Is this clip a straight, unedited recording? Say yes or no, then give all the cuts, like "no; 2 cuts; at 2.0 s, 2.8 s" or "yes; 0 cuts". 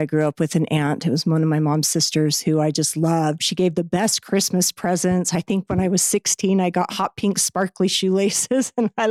no; 1 cut; at 3.4 s